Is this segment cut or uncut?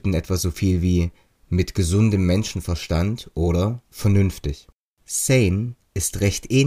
cut